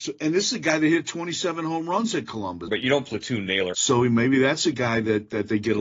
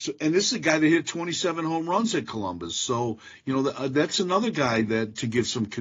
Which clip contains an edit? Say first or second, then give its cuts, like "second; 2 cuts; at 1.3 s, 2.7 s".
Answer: first; 2 cuts; at 2.7 s, 3.7 s